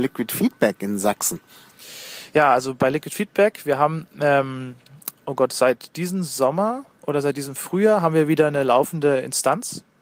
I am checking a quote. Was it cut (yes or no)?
no